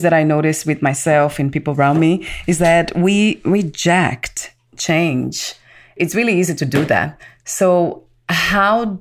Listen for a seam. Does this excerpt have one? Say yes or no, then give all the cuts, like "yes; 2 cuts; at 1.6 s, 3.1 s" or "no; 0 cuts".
no; 0 cuts